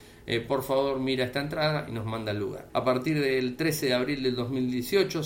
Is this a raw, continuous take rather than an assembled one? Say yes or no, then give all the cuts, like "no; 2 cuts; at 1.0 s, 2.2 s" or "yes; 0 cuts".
no; 1 cut; at 2.7 s